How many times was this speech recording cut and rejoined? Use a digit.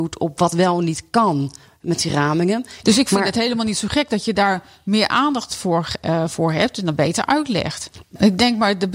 2